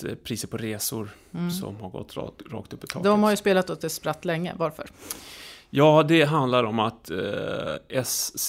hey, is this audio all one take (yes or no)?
yes